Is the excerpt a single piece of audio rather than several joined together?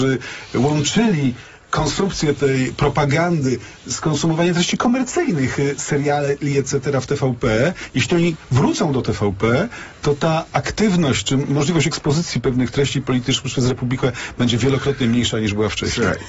yes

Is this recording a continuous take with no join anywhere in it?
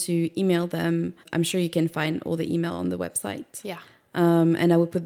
no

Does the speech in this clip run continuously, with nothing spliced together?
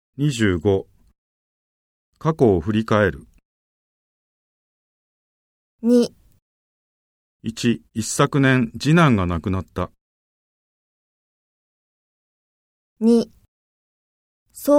no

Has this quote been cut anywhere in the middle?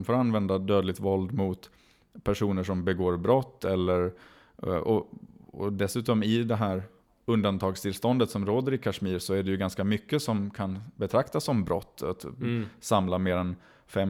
no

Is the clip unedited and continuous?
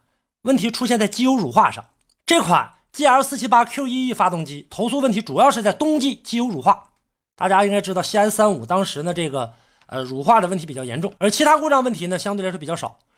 no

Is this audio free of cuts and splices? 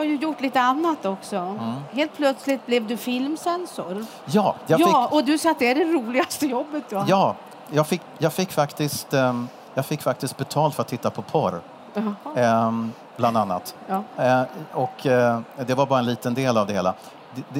yes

